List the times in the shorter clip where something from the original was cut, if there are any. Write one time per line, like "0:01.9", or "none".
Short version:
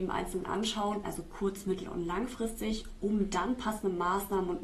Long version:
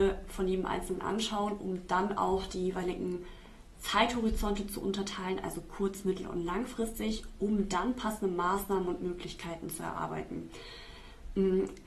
0:01.0